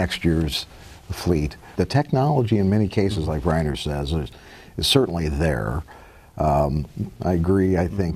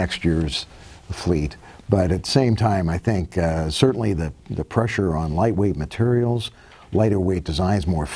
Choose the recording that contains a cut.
first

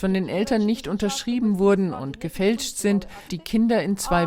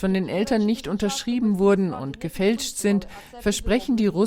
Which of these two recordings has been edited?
first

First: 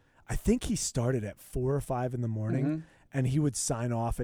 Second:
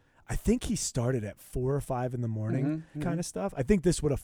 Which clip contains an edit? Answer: second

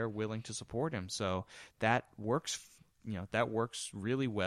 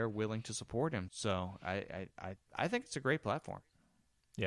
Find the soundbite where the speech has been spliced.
second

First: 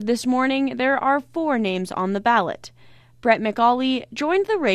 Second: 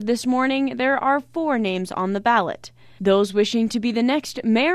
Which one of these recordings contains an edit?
second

